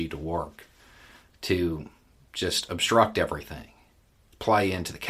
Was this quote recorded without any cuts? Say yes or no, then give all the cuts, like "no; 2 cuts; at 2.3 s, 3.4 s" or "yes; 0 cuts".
yes; 0 cuts